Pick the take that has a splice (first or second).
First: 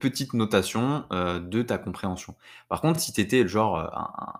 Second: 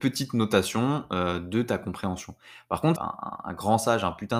second